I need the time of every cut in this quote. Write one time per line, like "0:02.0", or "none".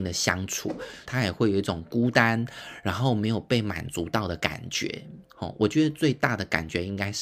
0:01.0